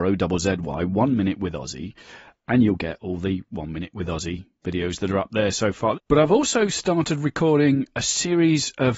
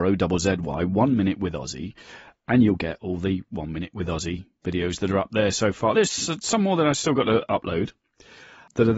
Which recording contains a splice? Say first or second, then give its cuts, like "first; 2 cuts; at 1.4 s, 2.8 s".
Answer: first; 1 cut; at 5.9 s